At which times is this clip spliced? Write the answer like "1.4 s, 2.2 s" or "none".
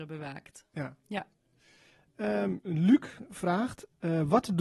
none